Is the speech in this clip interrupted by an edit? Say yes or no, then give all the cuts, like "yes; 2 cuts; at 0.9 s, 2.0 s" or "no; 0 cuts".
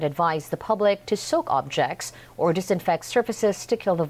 no; 0 cuts